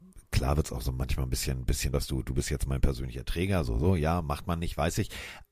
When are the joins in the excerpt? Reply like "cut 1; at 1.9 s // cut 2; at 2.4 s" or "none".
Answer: cut 1; at 1.9 s // cut 2; at 3.6 s